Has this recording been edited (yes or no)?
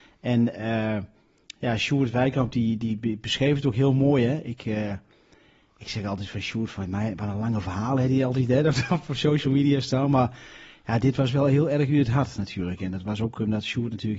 no